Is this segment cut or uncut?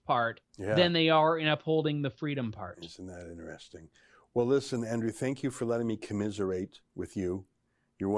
uncut